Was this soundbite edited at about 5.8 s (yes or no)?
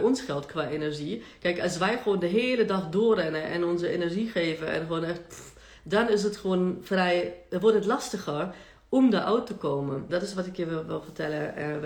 yes